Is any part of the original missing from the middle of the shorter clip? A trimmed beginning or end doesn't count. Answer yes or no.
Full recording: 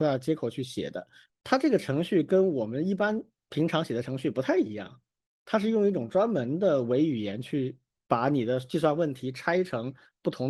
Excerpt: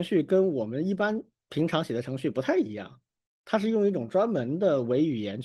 no